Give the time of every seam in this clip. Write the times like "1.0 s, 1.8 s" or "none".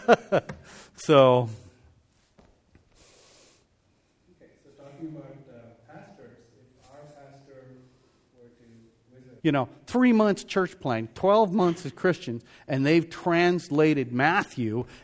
9.4 s